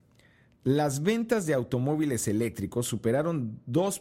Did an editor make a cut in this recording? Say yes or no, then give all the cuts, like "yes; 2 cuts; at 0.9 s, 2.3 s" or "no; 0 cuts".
no; 0 cuts